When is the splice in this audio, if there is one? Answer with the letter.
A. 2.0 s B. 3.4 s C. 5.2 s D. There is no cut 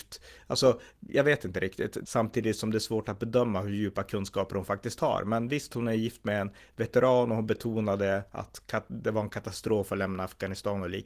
A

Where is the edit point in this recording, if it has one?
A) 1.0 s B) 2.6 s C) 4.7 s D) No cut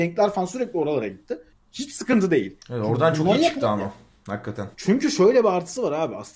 C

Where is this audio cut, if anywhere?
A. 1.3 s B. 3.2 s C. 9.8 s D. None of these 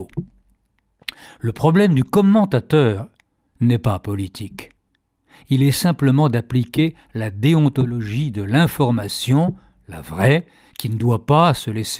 A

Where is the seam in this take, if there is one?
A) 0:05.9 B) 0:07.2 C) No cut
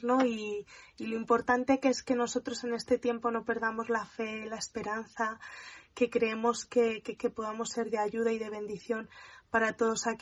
B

